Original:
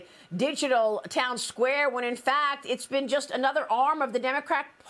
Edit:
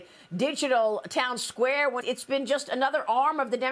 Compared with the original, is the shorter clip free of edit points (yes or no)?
no